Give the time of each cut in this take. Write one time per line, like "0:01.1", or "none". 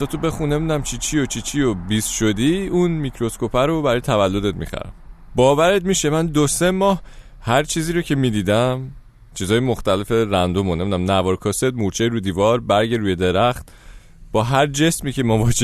none